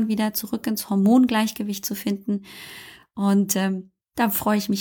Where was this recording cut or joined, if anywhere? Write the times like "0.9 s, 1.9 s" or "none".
none